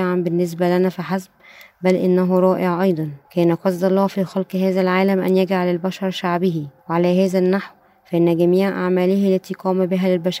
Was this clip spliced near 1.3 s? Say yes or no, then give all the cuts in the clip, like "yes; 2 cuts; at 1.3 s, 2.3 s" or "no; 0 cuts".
no; 2 cuts; at 3.2 s, 6.8 s